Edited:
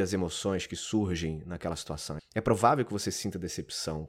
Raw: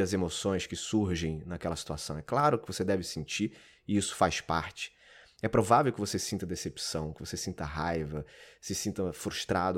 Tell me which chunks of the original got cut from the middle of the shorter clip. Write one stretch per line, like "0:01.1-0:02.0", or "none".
0:02.2-0:05.3